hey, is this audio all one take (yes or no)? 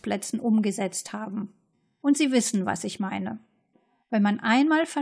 yes